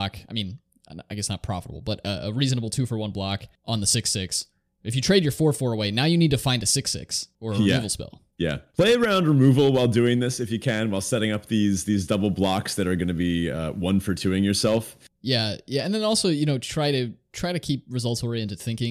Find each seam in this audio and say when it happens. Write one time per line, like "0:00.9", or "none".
0:08.3
0:15.1